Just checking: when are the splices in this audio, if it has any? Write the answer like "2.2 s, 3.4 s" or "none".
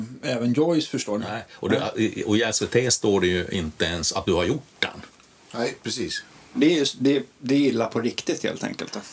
1.2 s, 6.5 s